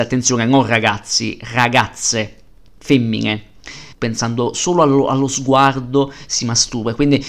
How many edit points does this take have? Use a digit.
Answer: 1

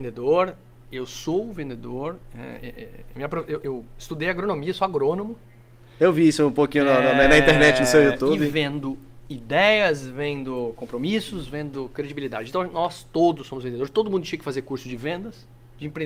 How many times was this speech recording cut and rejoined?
1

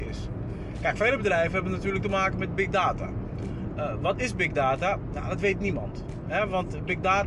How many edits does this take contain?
0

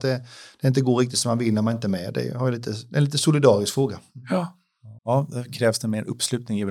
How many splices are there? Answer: 1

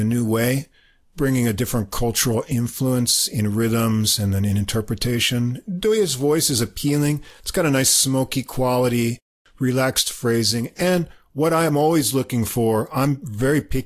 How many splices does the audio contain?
0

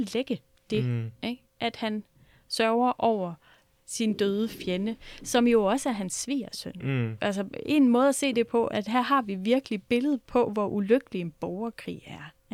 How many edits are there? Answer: 2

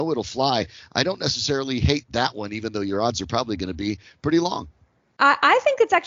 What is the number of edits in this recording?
0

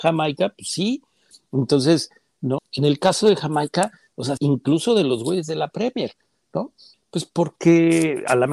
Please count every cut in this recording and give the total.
3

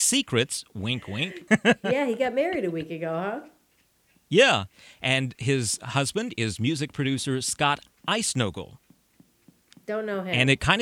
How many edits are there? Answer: 1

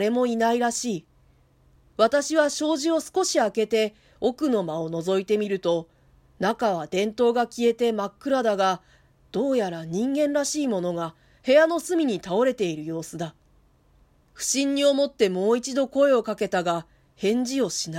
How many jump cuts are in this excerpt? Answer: 0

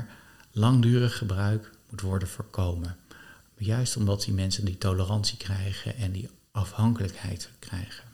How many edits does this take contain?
0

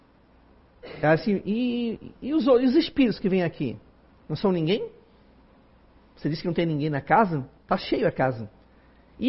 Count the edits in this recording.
0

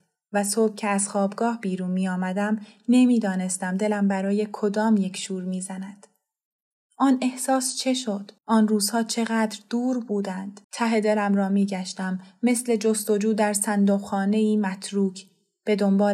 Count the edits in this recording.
2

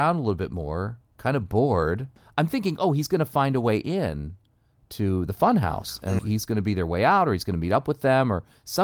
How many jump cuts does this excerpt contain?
1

